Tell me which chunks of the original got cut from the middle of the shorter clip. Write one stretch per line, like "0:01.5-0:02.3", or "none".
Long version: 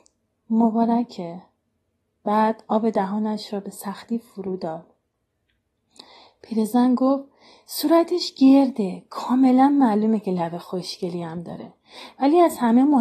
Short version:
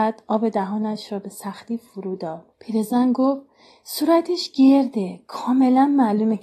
0:04.9-0:06.3